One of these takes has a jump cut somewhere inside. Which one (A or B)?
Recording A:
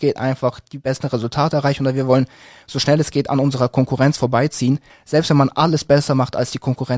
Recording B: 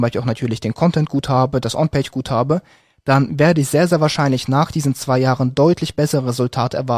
A